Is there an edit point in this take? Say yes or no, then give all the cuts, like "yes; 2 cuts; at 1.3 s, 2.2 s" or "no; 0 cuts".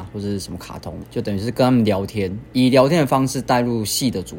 yes; 1 cut; at 1.0 s